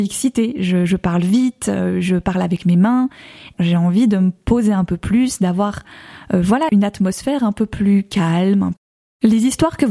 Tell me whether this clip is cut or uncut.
cut